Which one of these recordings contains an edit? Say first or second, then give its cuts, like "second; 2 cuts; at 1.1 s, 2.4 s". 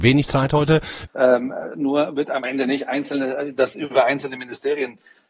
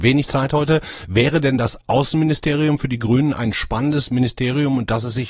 first; 1 cut; at 1.1 s